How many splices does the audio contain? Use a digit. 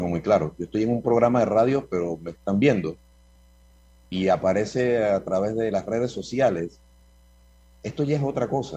0